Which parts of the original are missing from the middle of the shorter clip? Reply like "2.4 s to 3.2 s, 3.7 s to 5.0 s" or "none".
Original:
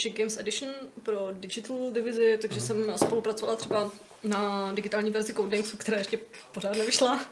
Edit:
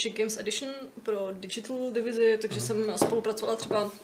none